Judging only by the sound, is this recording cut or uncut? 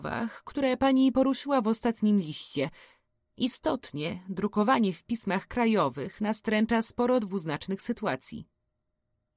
uncut